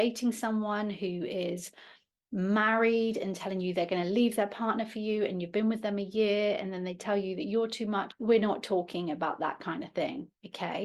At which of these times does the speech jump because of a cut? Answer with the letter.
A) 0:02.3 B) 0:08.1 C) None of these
B